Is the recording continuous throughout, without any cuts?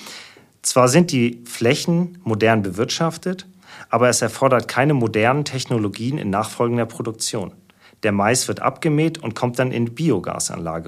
yes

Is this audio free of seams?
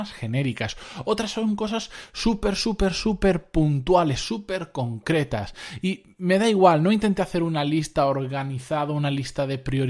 yes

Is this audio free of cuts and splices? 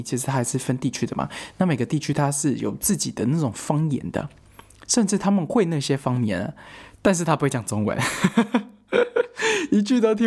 yes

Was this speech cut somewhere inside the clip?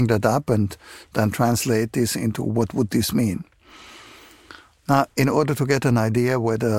no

